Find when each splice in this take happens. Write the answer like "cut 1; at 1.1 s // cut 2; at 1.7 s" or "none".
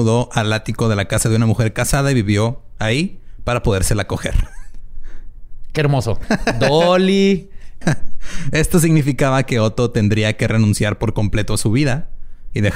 cut 1; at 6.2 s // cut 2; at 7.8 s